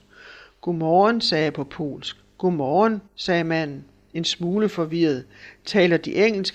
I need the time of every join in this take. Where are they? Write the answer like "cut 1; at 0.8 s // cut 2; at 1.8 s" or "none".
cut 1; at 3.1 s